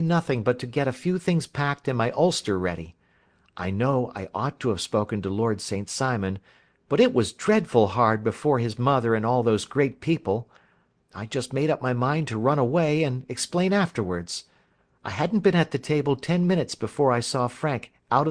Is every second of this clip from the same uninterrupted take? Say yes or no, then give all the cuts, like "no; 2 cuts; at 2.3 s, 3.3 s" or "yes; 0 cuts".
yes; 0 cuts